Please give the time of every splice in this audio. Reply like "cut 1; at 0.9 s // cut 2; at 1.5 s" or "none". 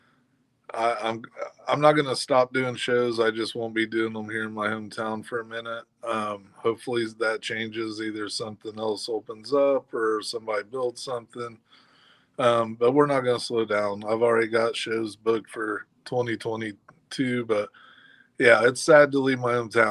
none